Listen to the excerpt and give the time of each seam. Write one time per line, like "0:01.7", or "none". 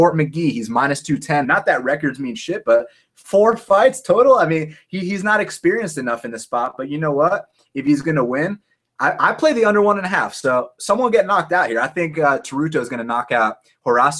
0:01.4